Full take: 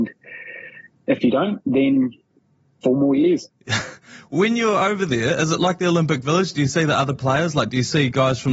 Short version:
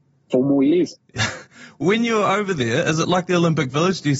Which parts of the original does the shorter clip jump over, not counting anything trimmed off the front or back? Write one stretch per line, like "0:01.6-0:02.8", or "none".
none